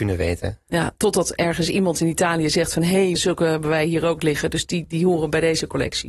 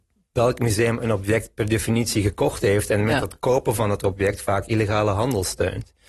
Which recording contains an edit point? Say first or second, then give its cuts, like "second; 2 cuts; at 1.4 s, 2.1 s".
first; 1 cut; at 3.2 s